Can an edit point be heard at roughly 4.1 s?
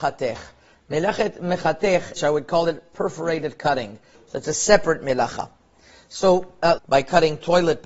yes; 3 cuts; at 2.2 s, 4.1 s, 6.8 s

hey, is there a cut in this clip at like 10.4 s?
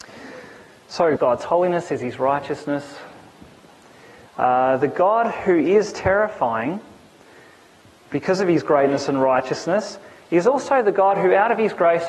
no; 2 cuts; at 1.2 s, 4.2 s

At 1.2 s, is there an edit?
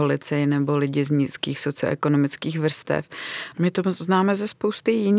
no; 1 cut; at 3.5 s

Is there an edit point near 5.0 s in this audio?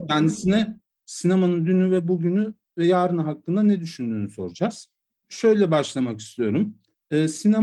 no; 0 cuts

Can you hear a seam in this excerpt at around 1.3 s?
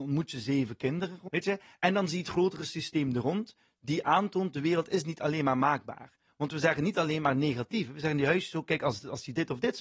yes; 1 cut; at 1.3 s

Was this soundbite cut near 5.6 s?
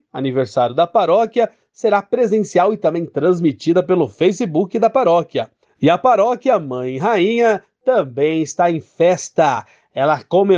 yes; 1 cut; at 5.6 s

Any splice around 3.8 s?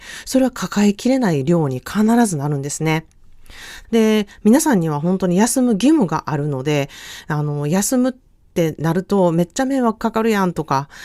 yes; 1 cut; at 3.8 s

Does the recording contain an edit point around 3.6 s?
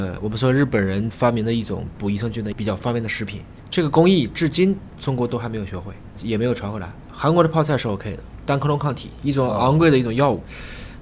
no; 1 cut; at 8.5 s

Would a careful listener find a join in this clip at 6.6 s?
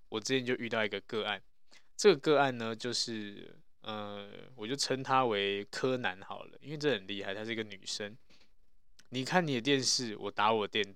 no; 1 cut; at 9.1 s

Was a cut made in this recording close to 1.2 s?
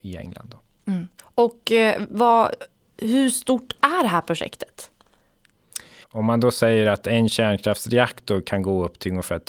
yes; 2 cuts; at 1.2 s, 6.0 s

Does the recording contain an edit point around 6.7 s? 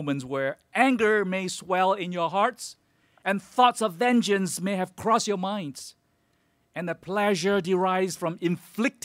no; 0 cuts

